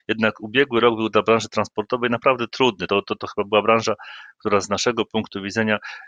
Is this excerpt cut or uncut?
uncut